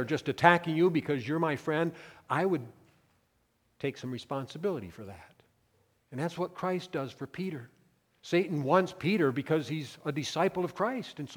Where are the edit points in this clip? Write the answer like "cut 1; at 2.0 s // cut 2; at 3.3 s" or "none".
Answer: cut 1; at 6.0 s